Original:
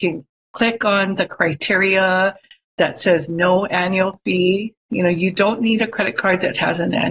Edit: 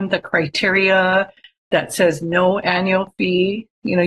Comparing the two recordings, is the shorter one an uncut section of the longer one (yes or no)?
yes